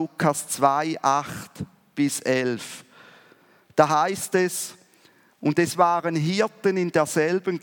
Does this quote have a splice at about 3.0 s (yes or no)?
no